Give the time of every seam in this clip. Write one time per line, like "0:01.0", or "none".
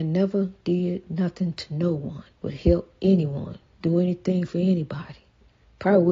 0:02.3